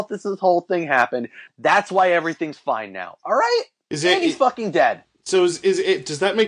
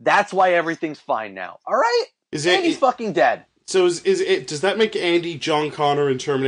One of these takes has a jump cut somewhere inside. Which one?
first; 1 cut; at 1.5 s

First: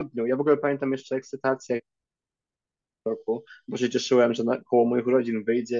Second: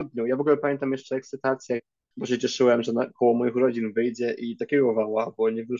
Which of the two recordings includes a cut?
second; 1 cut; at 2.1 s

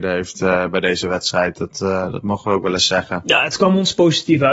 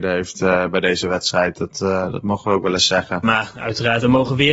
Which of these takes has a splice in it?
second; 1 cut; at 3.2 s

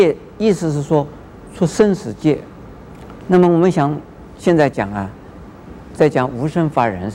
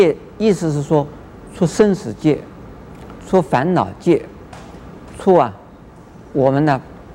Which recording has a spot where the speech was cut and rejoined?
first; 1 cut; at 3.2 s

